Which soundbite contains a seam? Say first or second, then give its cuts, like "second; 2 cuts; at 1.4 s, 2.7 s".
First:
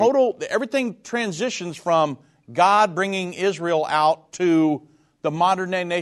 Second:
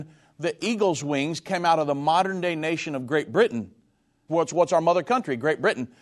second; 1 cut; at 4.3 s